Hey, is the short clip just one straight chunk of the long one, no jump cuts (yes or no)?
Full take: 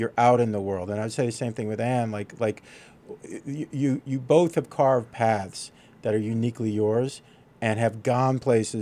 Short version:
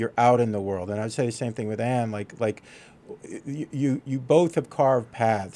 yes